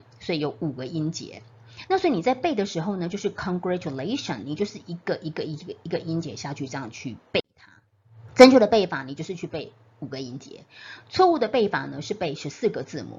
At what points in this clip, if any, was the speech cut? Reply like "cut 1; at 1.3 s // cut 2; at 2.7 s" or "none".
none